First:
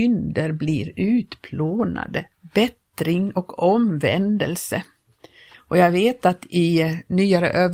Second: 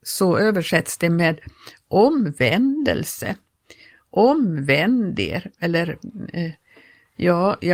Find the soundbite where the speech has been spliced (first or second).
first